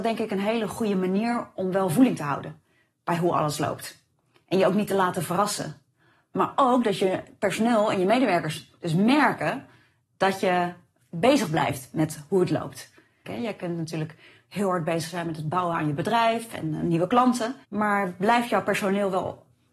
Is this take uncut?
no; 2 cuts; at 13.2 s, 17.6 s

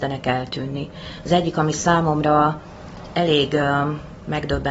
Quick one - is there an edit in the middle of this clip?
no; 0 cuts

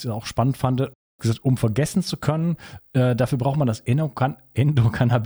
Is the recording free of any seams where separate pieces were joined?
yes; 0 cuts

